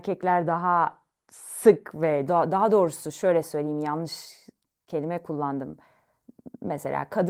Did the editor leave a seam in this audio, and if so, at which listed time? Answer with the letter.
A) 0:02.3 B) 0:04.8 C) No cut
A